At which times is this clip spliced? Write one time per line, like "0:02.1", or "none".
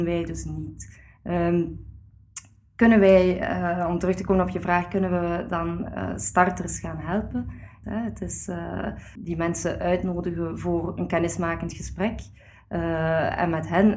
0:07.8
0:09.2